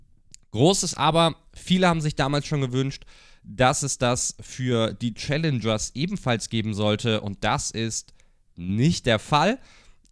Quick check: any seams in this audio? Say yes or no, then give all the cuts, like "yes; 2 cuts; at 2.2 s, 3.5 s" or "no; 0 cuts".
no; 0 cuts